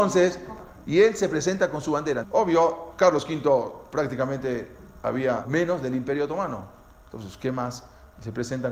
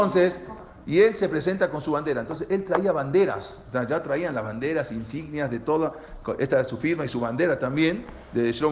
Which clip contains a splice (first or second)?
first